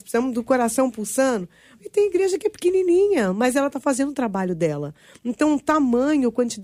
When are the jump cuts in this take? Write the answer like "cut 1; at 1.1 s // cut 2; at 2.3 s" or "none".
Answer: none